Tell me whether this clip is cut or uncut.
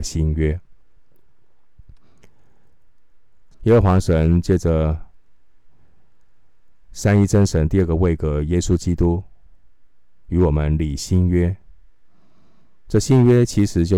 cut